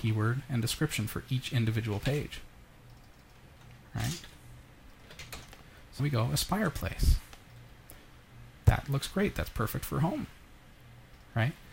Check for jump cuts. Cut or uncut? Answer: cut